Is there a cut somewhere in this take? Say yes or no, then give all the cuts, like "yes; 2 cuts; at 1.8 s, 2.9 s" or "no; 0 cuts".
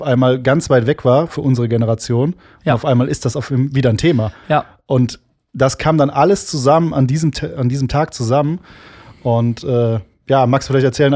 no; 0 cuts